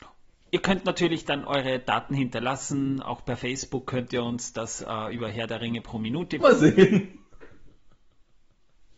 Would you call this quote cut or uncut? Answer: cut